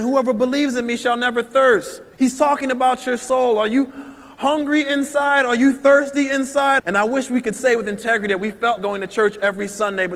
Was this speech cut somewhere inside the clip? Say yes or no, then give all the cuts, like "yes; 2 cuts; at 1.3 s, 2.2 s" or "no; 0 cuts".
yes; 3 cuts; at 2.1 s, 6.8 s, 8.8 s